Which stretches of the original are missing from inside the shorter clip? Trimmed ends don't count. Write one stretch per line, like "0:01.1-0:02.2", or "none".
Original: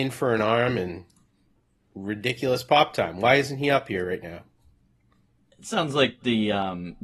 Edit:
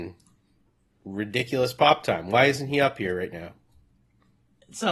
none